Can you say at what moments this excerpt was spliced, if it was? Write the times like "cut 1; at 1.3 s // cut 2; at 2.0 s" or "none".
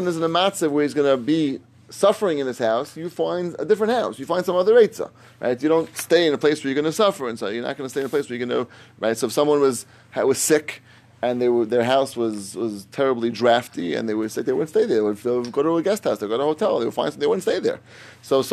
none